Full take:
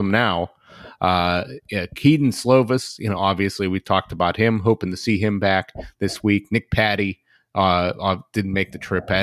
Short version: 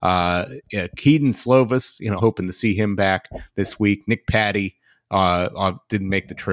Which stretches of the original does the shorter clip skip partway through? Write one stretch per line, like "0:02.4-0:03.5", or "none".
0:03.2-0:04.6